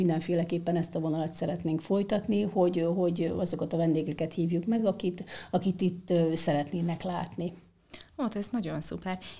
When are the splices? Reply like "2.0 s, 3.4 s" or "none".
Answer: none